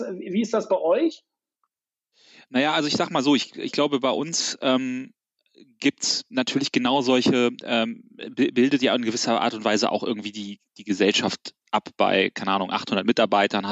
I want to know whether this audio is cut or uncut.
uncut